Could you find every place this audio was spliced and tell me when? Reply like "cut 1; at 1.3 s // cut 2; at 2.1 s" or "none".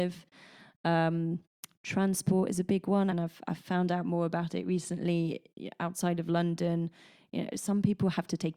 cut 1; at 3.1 s